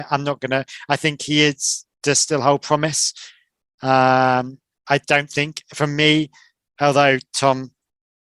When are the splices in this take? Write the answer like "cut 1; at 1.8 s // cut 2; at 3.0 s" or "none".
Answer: none